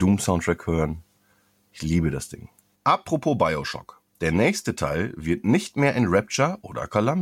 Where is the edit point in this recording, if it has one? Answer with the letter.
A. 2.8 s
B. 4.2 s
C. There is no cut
A